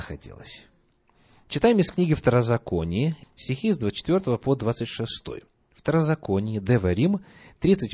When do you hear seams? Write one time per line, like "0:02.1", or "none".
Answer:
0:03.2